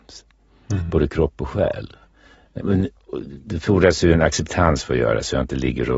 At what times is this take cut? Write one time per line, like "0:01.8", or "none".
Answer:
0:02.6